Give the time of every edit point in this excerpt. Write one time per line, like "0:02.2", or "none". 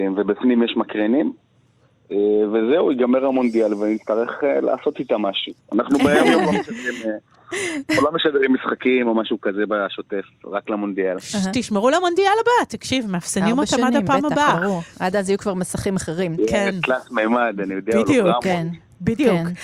none